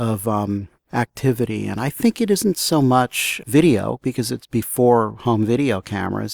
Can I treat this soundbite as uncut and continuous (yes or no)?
yes